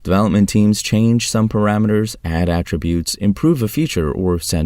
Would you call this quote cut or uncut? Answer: uncut